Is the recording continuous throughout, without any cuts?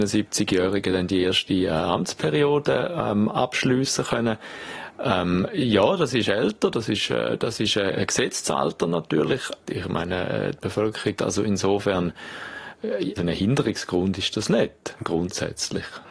no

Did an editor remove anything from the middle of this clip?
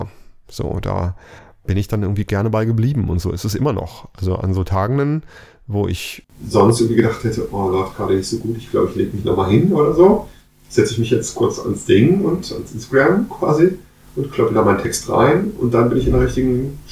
no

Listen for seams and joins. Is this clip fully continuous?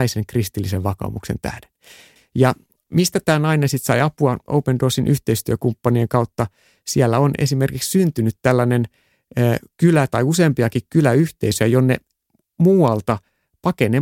no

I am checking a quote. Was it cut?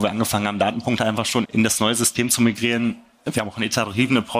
yes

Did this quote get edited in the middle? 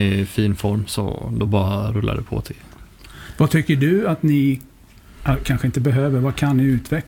no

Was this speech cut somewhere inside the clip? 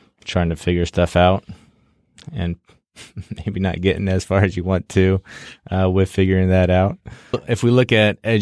yes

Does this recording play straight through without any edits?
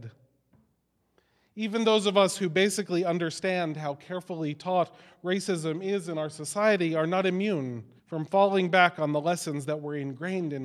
no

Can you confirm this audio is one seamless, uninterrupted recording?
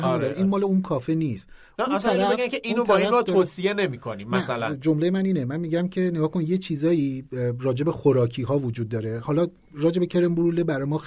yes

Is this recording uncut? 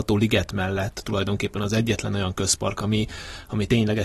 yes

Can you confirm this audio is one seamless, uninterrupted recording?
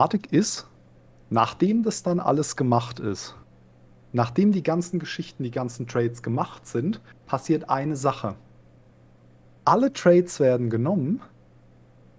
yes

